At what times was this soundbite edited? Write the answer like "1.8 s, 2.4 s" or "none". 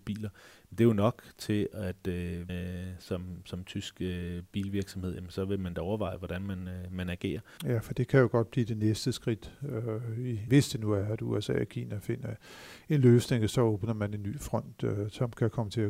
2.5 s, 7.6 s, 10.5 s